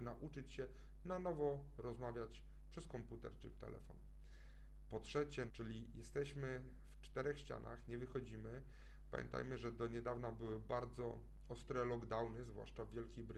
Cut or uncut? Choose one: cut